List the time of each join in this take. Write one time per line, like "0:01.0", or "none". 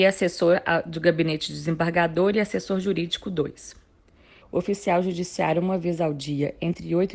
0:04.4